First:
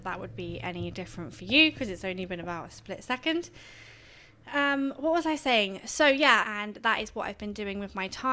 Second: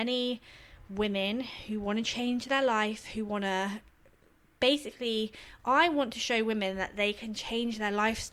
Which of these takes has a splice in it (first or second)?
first